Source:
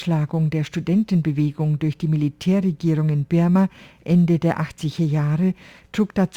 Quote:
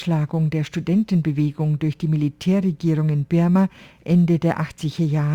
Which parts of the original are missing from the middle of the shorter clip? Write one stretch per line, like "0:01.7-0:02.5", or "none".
none

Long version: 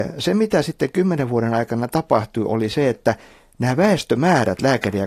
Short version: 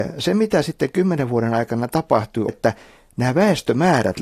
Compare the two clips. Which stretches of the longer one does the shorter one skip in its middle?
0:02.5-0:02.9

